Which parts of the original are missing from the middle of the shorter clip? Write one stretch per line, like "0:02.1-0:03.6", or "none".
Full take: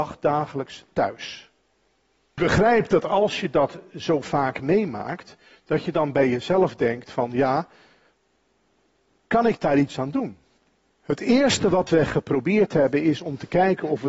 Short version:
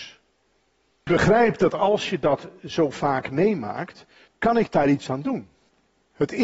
0:05.6-0:09.2